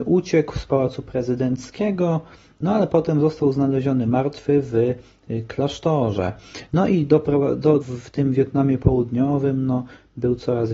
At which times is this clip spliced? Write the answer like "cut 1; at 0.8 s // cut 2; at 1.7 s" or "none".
cut 1; at 6.7 s // cut 2; at 7.8 s